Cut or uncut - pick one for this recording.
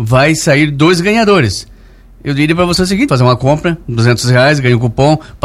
cut